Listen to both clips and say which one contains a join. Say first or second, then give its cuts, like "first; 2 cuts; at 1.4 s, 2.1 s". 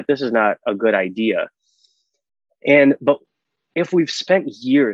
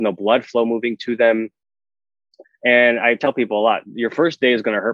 second; 1 cut; at 2.4 s